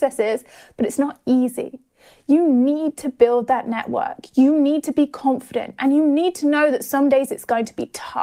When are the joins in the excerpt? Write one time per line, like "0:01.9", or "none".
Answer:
none